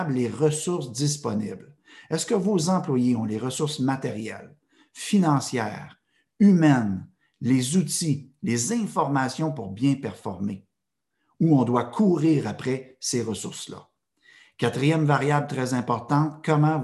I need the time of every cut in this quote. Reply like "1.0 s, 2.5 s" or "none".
none